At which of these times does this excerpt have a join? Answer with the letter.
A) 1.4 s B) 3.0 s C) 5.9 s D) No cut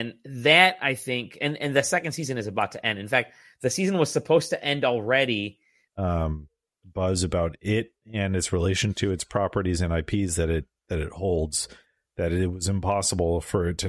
C